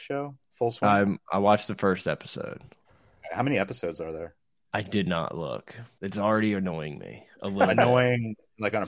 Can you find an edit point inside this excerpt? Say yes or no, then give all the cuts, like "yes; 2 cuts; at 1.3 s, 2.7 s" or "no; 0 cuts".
yes; 1 cut; at 6.0 s